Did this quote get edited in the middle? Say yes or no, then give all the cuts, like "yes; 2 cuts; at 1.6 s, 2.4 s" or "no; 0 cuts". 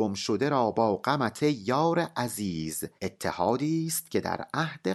yes; 1 cut; at 3.0 s